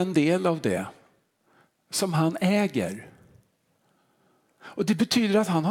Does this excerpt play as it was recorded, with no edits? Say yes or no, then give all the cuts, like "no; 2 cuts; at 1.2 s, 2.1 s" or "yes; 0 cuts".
yes; 0 cuts